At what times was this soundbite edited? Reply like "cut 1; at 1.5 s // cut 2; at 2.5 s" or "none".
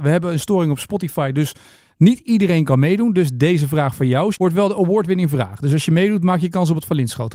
cut 1; at 4.3 s